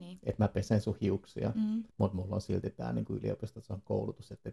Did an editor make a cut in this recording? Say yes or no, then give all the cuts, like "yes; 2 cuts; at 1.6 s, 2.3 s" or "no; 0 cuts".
yes; 1 cut; at 1.9 s